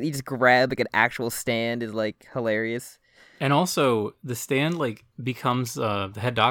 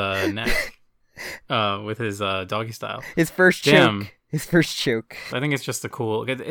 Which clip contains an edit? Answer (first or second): second